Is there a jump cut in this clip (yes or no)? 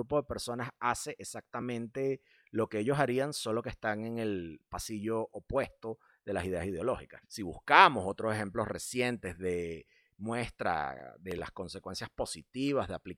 yes